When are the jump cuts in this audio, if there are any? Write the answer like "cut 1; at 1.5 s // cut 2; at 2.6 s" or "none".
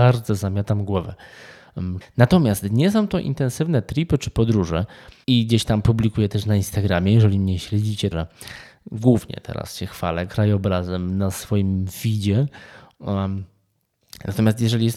cut 1; at 2.0 s // cut 2; at 5.2 s // cut 3; at 8.1 s